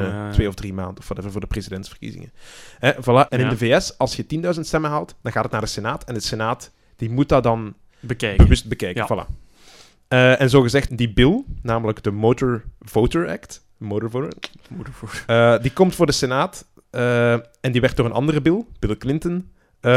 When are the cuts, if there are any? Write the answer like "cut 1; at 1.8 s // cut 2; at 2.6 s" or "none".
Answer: cut 1; at 3.3 s // cut 2; at 10.9 s